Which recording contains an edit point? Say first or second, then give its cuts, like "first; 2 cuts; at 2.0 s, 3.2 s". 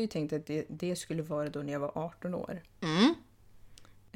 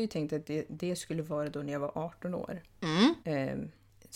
second; 1 cut; at 3.2 s